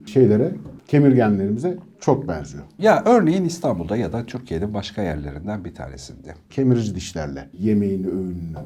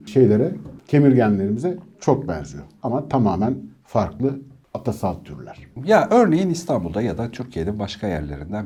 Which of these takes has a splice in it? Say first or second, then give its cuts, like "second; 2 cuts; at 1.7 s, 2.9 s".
first; 2 cuts; at 2.8 s, 6.5 s